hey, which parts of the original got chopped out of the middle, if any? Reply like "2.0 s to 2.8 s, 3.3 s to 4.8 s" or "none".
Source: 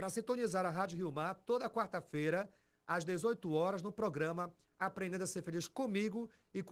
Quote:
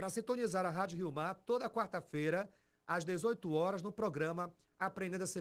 none